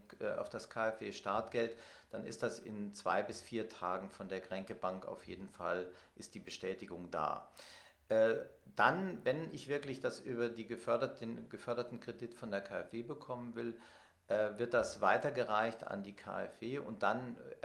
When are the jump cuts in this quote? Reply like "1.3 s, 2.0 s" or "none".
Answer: none